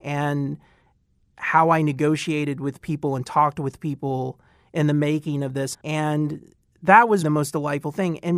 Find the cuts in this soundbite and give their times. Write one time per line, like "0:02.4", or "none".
0:05.7
0:07.2